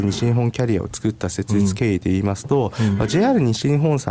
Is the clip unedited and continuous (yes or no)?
yes